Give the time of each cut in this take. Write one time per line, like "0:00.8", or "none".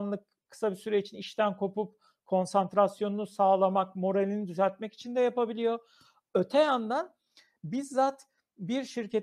none